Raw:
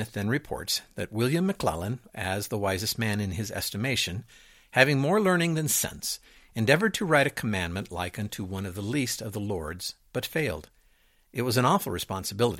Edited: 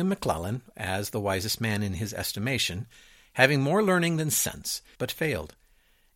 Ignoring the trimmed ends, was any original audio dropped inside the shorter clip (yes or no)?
yes